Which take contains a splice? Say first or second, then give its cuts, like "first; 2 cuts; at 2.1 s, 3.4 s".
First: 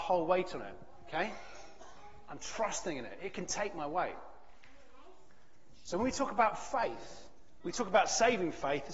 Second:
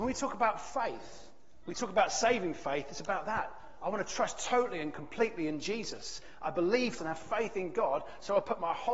second; 1 cut; at 7.0 s